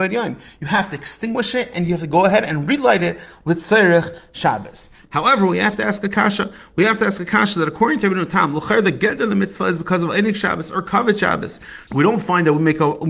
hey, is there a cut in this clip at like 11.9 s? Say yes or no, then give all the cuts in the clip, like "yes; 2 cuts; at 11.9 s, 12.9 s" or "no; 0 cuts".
yes; 1 cut; at 11.9 s